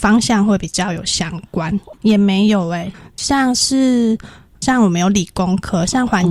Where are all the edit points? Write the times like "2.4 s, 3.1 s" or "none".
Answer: 1.9 s